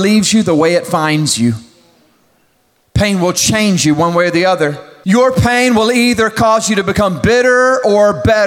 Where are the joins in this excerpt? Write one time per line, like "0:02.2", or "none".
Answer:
0:02.8
0:05.0